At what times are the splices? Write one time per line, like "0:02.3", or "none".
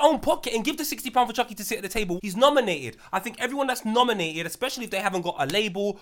0:02.2

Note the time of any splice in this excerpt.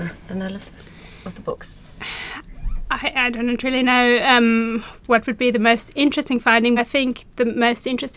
0:06.8

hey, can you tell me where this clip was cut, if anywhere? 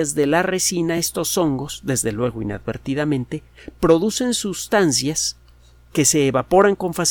none

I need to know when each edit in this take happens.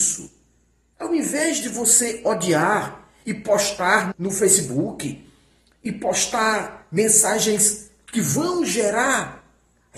0:00.9
0:04.1

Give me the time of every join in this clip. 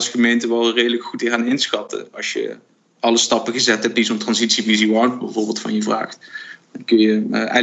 none

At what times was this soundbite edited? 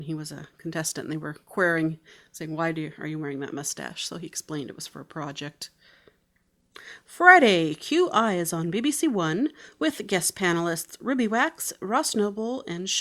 none

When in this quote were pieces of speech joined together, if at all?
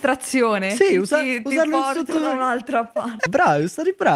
0:03.3

